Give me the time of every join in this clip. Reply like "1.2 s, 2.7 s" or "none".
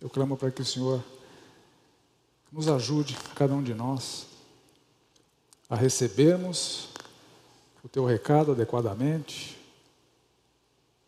none